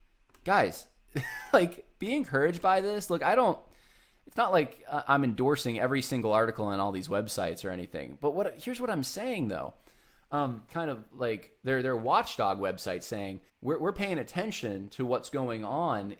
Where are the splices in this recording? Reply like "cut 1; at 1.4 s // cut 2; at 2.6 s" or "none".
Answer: cut 1; at 10.7 s // cut 2; at 13.5 s